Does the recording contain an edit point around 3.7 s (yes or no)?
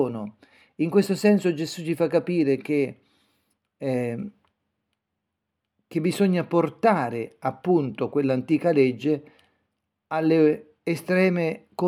no